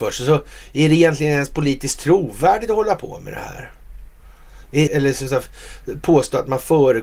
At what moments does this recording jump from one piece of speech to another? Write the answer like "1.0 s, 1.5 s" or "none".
4.9 s